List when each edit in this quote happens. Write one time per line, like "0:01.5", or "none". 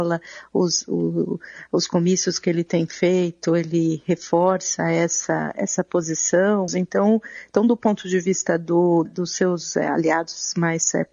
0:06.7
0:09.1